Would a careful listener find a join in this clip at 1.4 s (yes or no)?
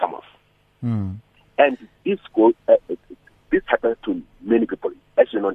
yes